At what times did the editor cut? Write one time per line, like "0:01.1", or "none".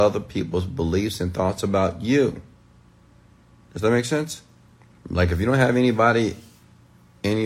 0:05.0